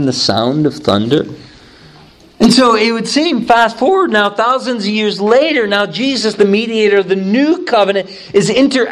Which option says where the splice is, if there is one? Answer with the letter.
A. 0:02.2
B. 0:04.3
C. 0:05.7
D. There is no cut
A